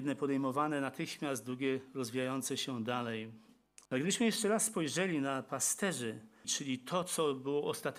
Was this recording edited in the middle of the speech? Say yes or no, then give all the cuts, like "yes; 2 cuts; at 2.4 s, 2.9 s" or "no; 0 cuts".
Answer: yes; 2 cuts; at 3.9 s, 6.4 s